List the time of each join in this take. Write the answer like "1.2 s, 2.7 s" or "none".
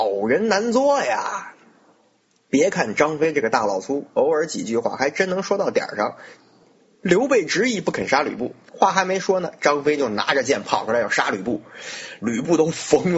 6.4 s, 8.7 s, 12.2 s